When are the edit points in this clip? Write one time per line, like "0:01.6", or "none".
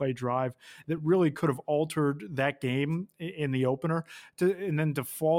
none